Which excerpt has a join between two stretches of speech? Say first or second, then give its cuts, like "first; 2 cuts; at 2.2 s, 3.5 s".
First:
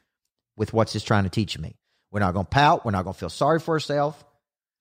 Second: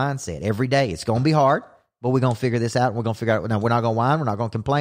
first; 1 cut; at 2.0 s